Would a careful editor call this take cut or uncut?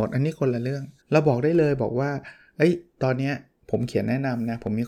cut